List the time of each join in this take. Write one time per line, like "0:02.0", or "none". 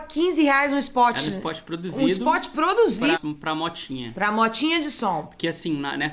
0:03.1